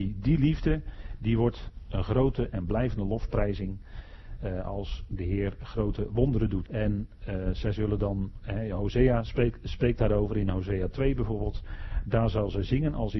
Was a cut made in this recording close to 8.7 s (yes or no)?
no